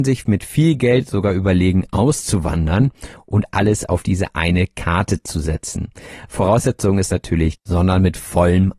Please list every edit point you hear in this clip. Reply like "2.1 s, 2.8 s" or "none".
7.6 s

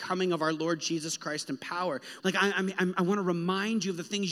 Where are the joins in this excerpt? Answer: 2.2 s

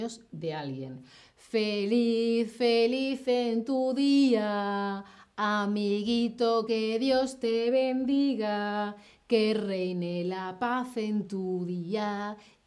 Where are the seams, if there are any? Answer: none

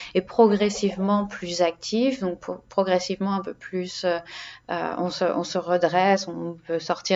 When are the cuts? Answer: none

